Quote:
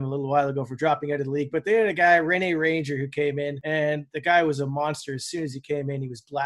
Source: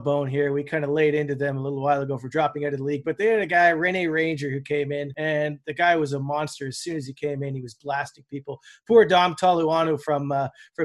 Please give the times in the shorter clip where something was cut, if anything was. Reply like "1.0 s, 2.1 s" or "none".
none